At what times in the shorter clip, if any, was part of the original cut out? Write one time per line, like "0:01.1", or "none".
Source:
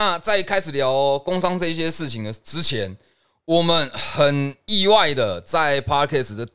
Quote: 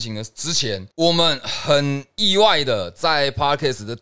0:00.9